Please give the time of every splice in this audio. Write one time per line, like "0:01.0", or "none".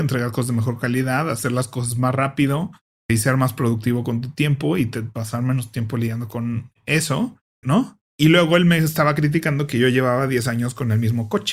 0:07.6